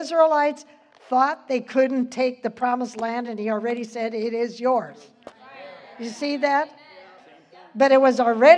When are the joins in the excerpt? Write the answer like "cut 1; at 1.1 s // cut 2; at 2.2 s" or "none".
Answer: none